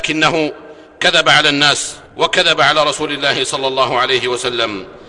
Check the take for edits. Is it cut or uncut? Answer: cut